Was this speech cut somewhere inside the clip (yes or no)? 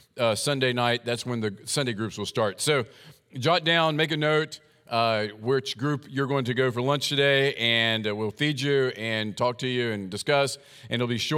no